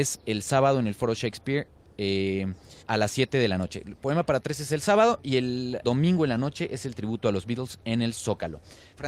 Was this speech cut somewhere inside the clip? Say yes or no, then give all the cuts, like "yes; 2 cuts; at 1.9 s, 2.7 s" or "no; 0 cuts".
yes; 2 cuts; at 2.8 s, 5.8 s